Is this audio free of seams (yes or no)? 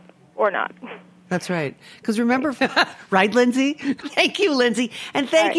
no